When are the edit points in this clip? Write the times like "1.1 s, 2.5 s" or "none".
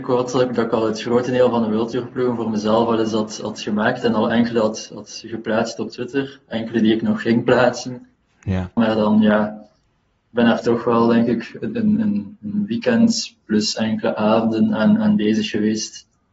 8.8 s